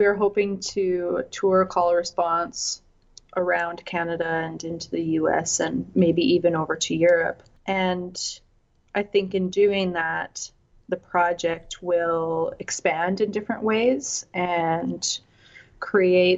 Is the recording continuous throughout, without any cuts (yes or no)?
yes